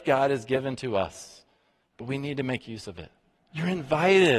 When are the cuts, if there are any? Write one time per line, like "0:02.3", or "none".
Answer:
0:03.4